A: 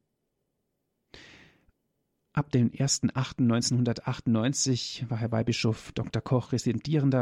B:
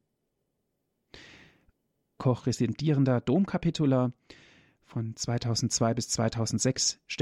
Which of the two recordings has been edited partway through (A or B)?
B